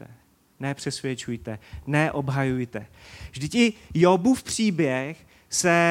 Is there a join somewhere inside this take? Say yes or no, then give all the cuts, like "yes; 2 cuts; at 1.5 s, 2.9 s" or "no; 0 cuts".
no; 0 cuts